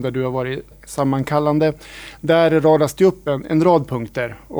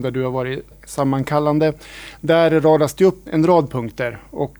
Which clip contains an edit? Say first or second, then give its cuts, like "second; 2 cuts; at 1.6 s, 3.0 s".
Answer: second; 1 cut; at 3.3 s